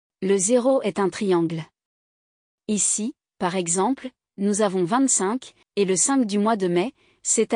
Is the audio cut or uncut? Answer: cut